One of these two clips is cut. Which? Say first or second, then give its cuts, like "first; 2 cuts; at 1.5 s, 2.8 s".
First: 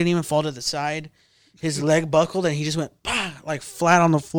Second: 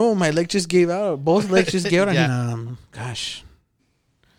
second; 1 cut; at 2.3 s